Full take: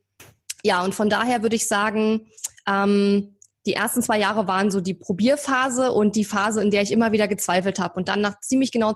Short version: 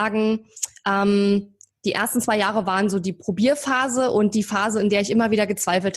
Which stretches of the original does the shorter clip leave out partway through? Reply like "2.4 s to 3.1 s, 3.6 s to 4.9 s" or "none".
none

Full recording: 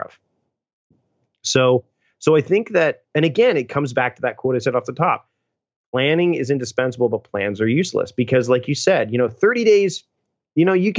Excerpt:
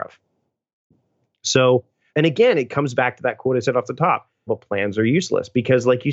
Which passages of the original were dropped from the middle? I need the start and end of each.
2.1 s to 3.1 s, 5.5 s to 7.1 s

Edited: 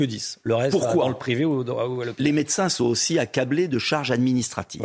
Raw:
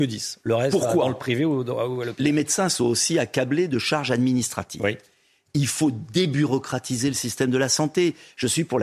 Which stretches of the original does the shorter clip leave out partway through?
none

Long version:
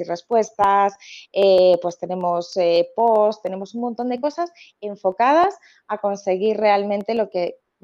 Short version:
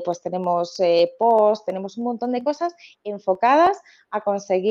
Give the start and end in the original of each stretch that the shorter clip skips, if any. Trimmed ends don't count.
none

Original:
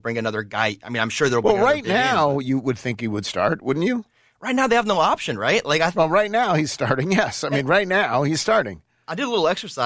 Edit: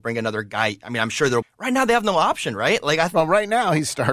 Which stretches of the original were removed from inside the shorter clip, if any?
1.4 s to 4.2 s

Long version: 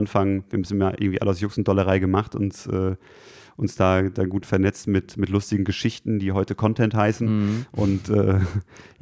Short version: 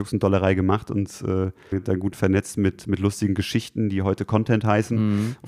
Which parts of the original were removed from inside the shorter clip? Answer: 3.2 s to 4.0 s

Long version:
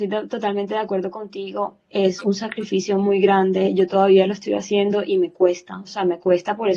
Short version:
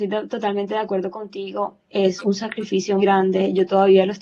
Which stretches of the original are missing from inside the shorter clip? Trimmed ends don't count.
3.0 s to 3.2 s

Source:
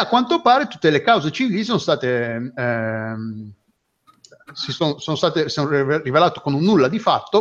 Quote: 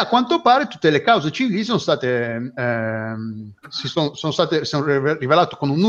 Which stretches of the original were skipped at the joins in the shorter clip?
3.6 s to 4.4 s

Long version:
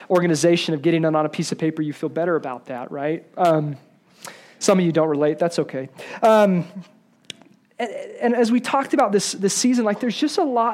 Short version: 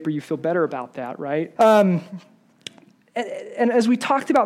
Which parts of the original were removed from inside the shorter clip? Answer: 3.3 s to 6.2 s

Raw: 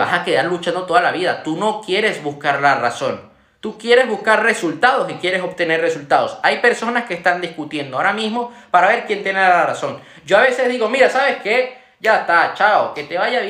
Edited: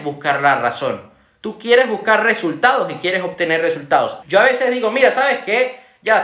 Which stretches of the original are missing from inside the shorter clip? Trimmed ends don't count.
6.4 s to 10.2 s

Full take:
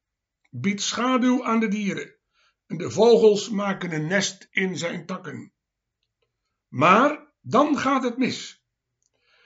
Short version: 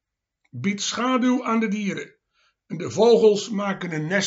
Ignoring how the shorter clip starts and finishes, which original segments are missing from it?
none

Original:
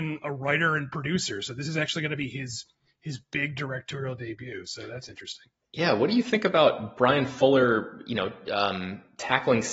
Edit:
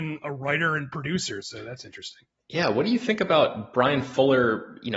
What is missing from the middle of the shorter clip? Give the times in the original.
1.4 s to 4.6 s

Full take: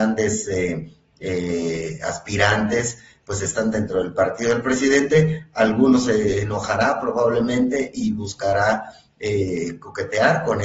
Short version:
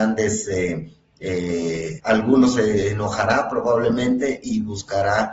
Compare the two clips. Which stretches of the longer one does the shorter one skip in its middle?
2.0 s to 5.5 s

